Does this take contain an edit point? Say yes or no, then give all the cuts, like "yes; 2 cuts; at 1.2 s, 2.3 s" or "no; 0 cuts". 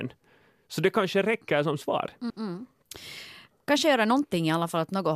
yes; 1 cut; at 2.3 s